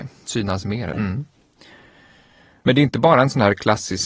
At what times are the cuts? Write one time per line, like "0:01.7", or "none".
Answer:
0:00.9